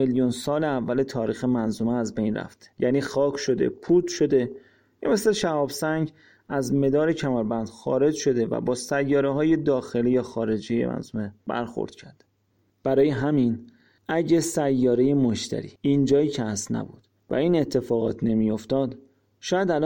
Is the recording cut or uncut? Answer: cut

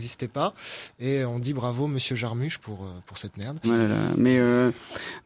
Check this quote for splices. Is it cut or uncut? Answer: cut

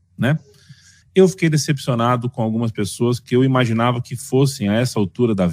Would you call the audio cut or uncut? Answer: cut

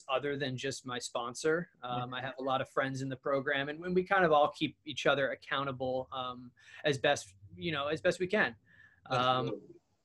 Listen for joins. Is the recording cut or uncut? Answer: uncut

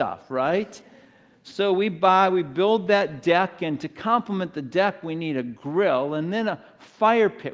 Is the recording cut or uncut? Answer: uncut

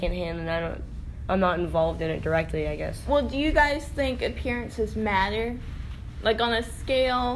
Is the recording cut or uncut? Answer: uncut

